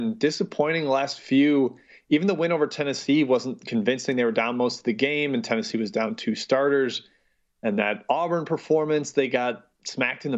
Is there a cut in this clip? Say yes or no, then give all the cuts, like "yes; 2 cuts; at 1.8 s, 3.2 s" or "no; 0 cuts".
no; 0 cuts